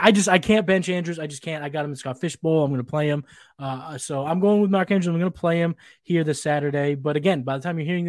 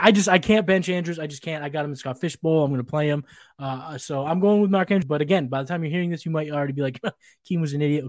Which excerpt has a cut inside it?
second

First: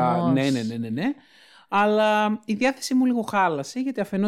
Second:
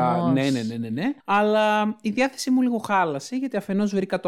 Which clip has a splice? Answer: second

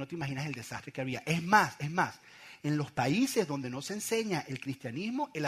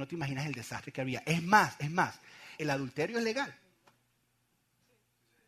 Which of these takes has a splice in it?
second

